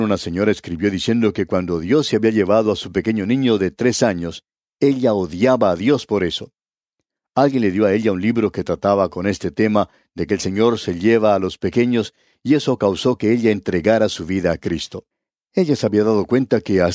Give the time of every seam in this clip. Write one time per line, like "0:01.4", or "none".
none